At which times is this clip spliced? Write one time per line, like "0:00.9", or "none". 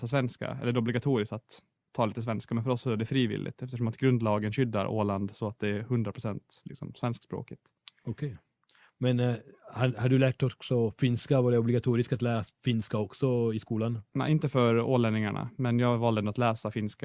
none